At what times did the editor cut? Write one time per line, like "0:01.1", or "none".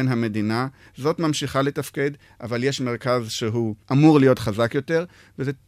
0:03.8

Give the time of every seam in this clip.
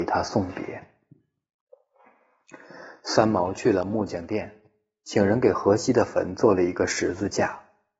none

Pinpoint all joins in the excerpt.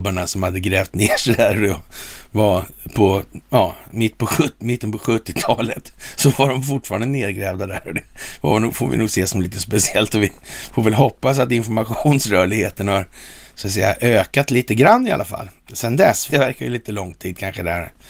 0:16.3

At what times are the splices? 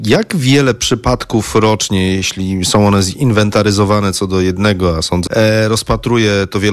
0:05.3

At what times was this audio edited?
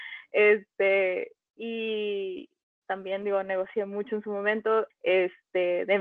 0:02.8
0:04.9

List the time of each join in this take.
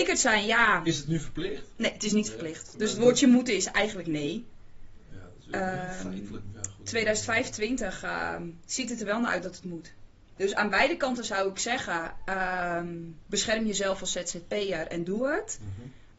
0:10.4

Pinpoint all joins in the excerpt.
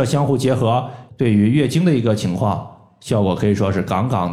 0:01.1

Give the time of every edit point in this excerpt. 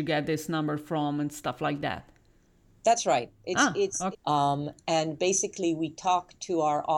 0:04.1

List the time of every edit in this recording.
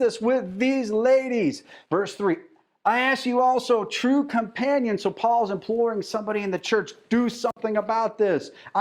0:01.8

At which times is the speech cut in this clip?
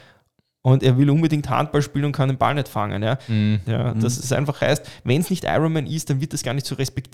0:03.6

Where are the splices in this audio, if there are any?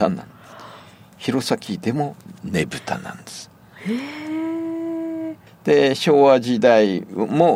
0:05.5

